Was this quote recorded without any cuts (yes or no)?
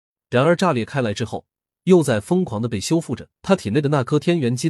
no